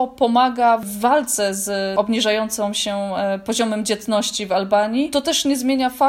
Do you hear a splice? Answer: no; 0 cuts

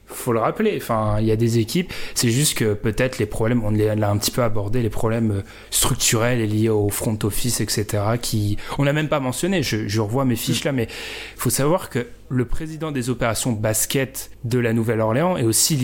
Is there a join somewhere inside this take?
no; 0 cuts

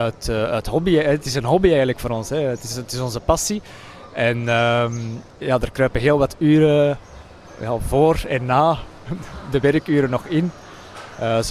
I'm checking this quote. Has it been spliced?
no; 0 cuts

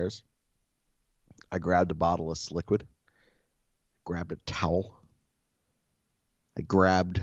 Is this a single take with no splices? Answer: yes; 0 cuts

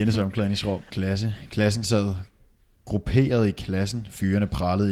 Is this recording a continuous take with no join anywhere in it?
no; 1 cut; at 0.9 s

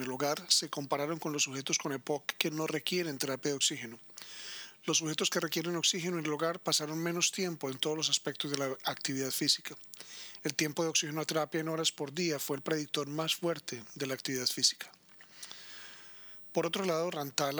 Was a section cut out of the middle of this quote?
no; 0 cuts

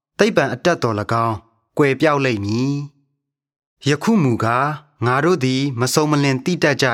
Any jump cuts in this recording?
no; 0 cuts

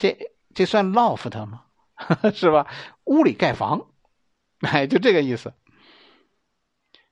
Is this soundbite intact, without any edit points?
yes; 0 cuts

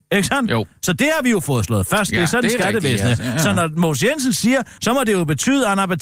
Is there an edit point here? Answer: yes; 1 cut; at 4.8 s

